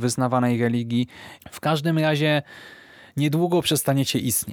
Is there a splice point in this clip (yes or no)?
yes